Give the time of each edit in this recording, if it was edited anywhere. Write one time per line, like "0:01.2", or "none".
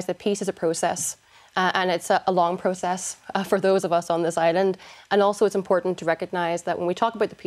none